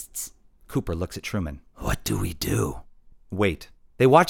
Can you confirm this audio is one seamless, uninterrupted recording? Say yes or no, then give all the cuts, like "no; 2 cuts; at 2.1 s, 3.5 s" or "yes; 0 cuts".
no; 2 cuts; at 1.7 s, 3.1 s